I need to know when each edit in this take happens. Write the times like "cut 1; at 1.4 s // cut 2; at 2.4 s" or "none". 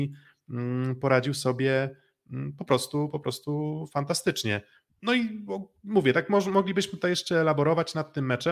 cut 1; at 4.9 s